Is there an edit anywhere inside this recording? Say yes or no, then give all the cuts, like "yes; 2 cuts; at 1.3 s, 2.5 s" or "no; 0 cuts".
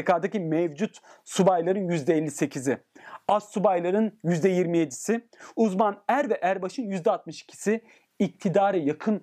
no; 0 cuts